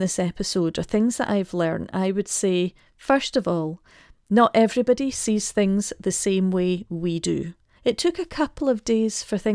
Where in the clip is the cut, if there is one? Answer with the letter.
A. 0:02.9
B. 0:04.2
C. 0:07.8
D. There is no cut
C